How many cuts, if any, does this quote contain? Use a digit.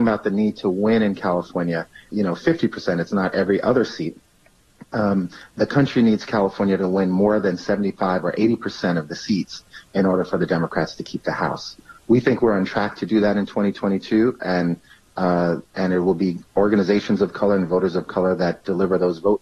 1